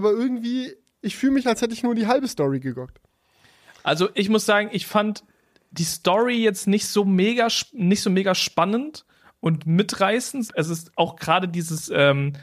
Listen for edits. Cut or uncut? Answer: cut